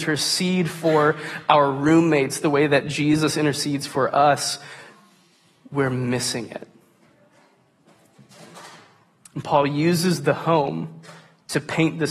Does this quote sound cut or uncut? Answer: uncut